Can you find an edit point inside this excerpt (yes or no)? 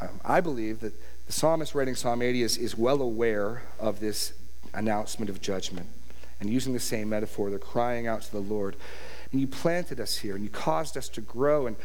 yes